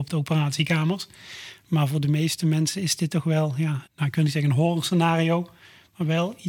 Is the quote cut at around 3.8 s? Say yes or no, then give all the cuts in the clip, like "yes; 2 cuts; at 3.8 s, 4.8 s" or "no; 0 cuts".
yes; 2 cuts; at 1.6 s, 3.8 s